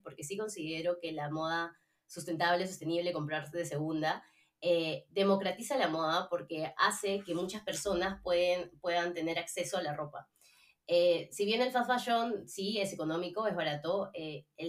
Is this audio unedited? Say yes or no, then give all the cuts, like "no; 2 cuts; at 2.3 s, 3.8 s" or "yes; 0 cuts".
yes; 0 cuts